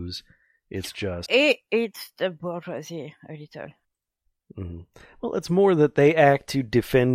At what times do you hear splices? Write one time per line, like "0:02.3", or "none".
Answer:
0:01.3